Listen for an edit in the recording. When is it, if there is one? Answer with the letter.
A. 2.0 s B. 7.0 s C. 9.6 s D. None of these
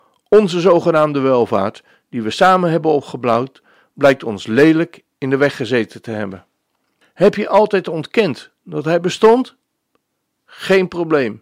B